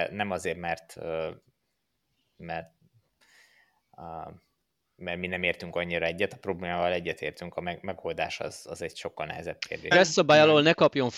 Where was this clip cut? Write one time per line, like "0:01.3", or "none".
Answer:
0:09.9